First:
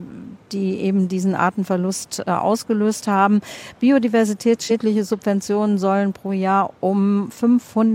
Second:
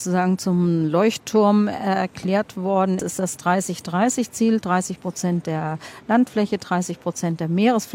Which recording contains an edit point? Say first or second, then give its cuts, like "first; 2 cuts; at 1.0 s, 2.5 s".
second; 1 cut; at 3.0 s